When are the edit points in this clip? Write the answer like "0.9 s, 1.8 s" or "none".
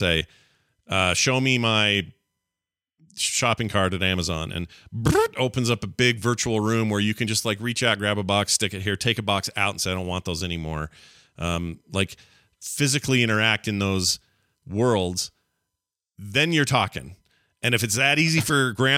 none